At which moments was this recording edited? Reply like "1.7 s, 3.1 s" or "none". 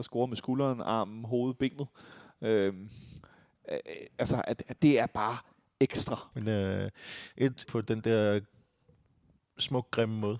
4.8 s, 6.3 s, 7.7 s